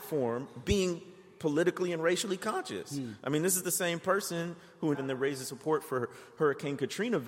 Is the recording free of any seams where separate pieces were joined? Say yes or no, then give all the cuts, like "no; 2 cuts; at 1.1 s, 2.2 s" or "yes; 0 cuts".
no; 1 cut; at 4.9 s